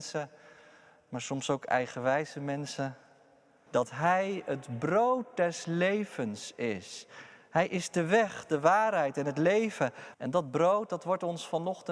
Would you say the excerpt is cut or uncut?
cut